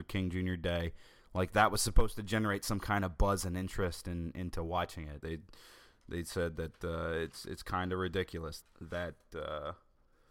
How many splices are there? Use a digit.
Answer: 2